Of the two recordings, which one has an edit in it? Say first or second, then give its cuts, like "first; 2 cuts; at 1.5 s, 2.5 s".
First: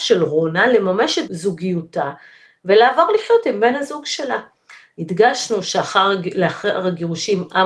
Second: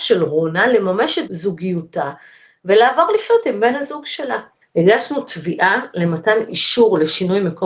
second; 1 cut; at 4.6 s